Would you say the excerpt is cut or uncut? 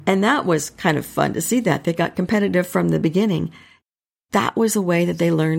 uncut